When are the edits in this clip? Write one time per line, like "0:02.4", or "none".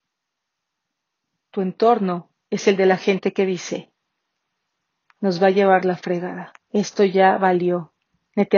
0:06.6